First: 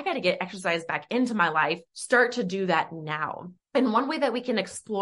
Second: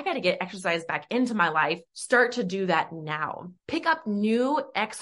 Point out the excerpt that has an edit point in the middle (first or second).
second